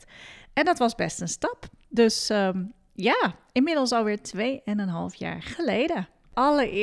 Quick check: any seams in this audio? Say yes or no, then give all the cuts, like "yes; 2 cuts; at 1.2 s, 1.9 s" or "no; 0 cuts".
no; 0 cuts